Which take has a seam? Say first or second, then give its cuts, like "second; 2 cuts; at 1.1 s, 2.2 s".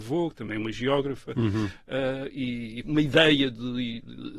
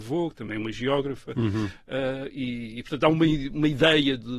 first; 1 cut; at 2.8 s